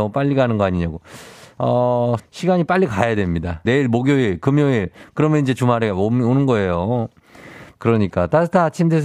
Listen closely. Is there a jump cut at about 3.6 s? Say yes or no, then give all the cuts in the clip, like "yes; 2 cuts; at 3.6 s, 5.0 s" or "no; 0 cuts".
yes; 3 cuts; at 2.2 s, 3.6 s, 7.8 s